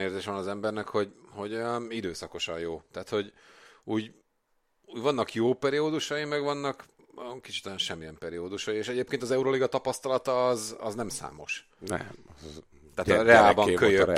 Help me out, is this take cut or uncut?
uncut